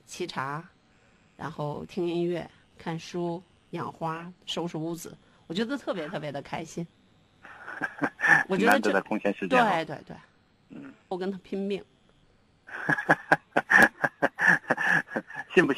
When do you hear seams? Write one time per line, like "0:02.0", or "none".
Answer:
0:09.9
0:11.1